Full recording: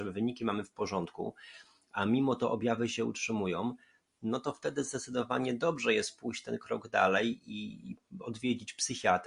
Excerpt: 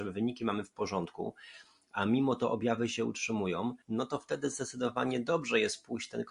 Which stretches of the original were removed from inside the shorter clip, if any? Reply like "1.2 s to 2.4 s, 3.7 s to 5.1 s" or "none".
3.8 s to 4.2 s